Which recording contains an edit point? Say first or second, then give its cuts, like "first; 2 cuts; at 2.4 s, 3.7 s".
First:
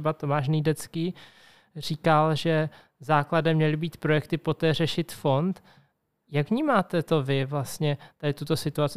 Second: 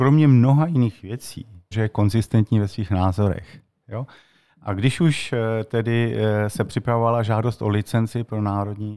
second; 1 cut; at 1.7 s